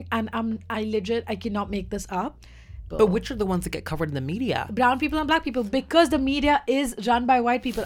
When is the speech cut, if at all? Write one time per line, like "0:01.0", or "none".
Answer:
0:02.9